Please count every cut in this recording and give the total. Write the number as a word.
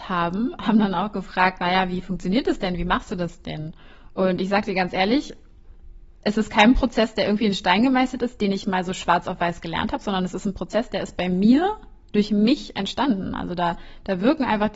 zero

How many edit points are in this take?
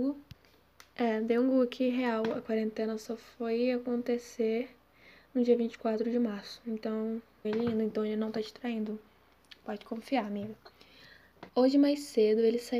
two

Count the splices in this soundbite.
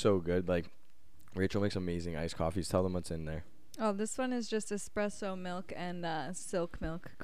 zero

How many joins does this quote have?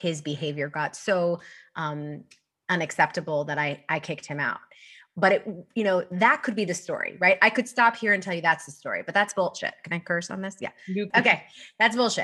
one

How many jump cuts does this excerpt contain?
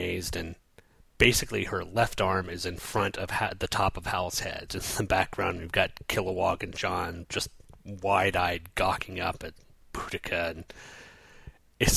one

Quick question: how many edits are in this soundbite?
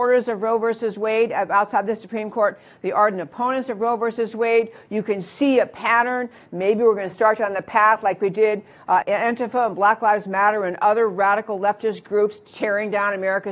one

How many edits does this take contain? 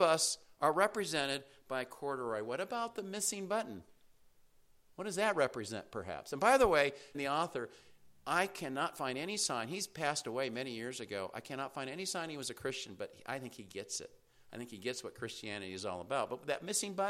one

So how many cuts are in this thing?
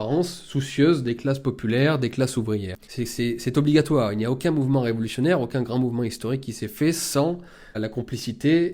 two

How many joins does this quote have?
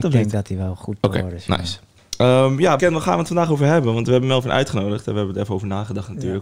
one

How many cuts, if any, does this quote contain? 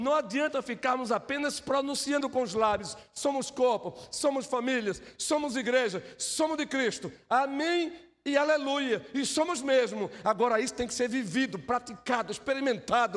zero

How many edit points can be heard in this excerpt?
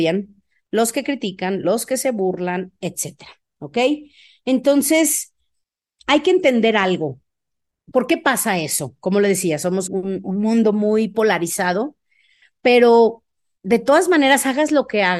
one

